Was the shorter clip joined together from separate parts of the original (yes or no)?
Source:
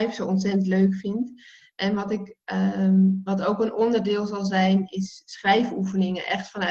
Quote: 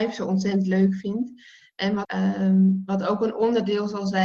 yes